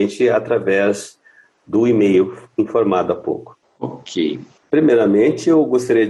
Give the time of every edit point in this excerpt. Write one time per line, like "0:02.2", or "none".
0:04.6